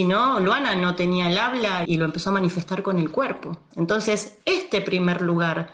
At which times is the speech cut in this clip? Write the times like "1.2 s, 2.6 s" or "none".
1.8 s, 3.7 s

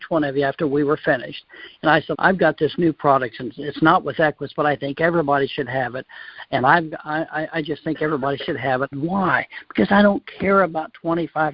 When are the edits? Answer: 2.1 s, 8.9 s

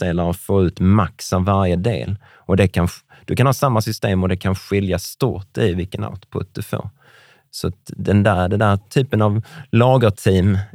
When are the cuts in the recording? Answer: none

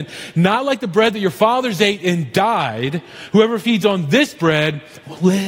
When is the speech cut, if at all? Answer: none

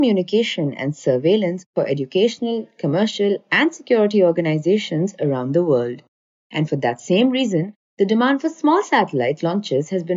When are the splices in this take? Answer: none

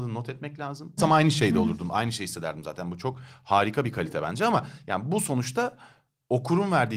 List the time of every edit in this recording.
1.0 s

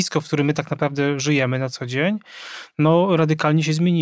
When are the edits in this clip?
none

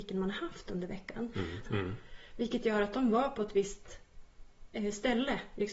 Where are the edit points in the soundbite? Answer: 1.7 s

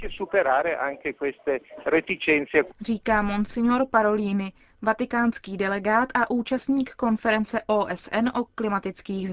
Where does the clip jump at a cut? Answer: none

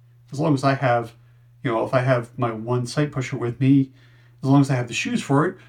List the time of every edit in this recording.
none

